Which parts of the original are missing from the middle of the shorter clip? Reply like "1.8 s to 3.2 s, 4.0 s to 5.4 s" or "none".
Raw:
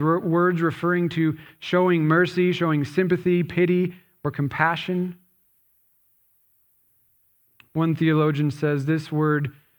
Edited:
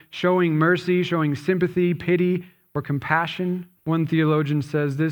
5.2 s to 7.6 s